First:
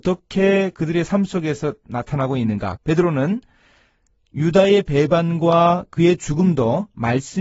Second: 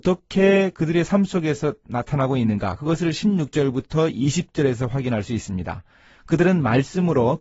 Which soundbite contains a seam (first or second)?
first